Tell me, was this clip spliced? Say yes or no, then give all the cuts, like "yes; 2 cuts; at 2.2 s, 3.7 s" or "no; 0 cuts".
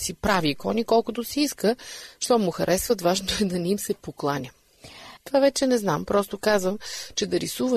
yes; 1 cut; at 5.2 s